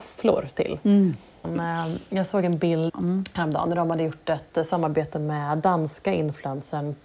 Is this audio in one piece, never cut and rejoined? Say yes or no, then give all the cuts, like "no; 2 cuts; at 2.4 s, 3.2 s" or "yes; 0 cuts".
no; 2 cuts; at 1.4 s, 2.9 s